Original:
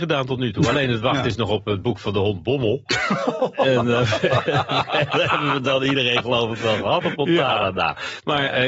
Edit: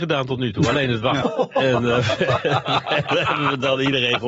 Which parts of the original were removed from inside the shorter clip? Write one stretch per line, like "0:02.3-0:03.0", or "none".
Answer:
0:01.2-0:03.2